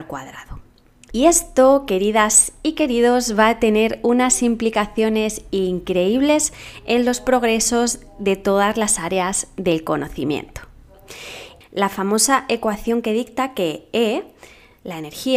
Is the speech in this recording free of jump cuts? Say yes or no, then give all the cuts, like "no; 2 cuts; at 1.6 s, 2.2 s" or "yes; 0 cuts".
no; 2 cuts; at 1.1 s, 11.6 s